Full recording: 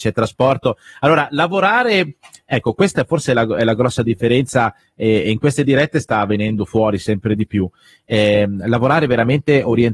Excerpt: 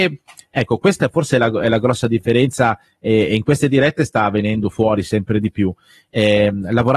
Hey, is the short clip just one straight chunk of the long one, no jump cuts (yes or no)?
yes